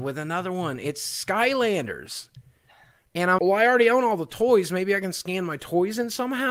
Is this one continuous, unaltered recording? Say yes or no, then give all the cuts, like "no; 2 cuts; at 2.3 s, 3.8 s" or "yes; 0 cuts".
no; 1 cut; at 3.4 s